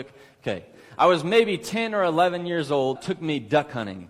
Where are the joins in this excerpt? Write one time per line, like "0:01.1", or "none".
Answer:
0:03.0